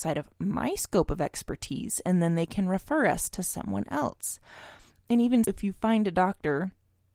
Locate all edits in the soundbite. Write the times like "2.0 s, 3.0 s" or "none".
5.4 s